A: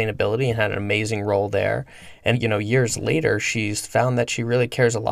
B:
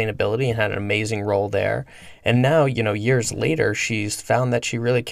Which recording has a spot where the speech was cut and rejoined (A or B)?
A